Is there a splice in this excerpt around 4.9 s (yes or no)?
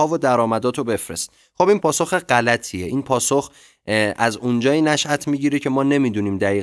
no